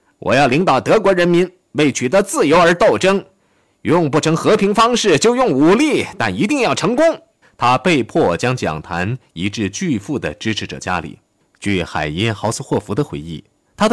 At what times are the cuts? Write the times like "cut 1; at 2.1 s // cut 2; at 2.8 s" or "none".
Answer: cut 1; at 7.4 s